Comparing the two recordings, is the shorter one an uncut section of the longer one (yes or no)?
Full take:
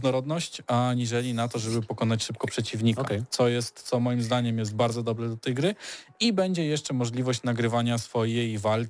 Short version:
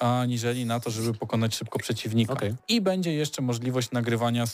no